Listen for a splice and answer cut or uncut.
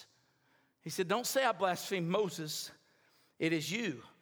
uncut